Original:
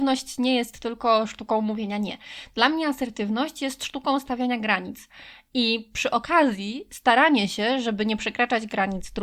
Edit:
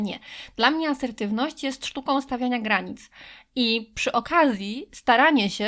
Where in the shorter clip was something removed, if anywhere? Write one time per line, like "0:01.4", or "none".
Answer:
none